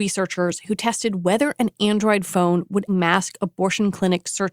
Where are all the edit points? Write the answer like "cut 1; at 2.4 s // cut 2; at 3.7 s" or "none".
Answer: cut 1; at 2.9 s